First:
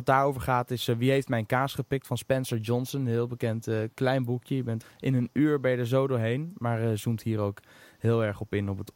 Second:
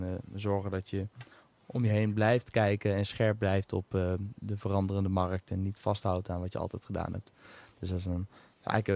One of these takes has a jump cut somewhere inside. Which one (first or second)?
first